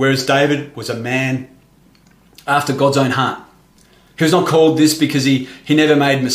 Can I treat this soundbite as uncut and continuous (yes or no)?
yes